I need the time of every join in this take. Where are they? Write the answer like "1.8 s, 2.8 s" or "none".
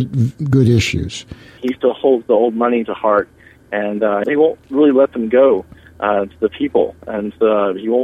1.6 s, 4.2 s